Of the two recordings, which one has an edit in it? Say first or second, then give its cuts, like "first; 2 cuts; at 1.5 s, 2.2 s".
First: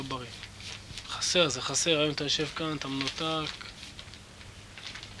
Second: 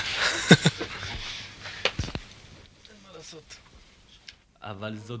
second; 1 cut; at 1.9 s